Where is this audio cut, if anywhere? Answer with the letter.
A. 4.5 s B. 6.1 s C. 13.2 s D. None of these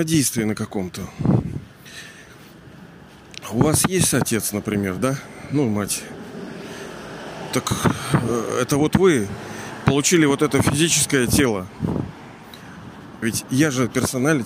C